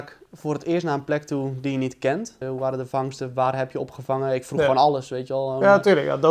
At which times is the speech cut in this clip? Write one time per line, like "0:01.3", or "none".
0:02.4